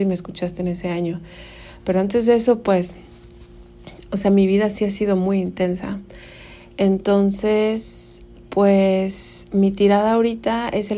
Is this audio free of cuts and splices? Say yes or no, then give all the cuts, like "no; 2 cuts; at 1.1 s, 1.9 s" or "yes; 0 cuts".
yes; 0 cuts